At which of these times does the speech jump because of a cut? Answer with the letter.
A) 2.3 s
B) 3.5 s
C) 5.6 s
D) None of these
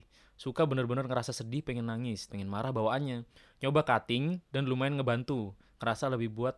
A